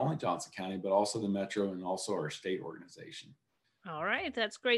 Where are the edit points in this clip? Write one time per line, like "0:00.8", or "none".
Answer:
0:03.8